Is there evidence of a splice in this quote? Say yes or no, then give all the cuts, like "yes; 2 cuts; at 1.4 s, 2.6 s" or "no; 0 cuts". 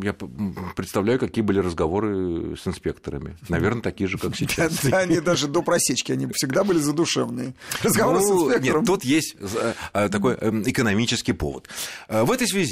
no; 0 cuts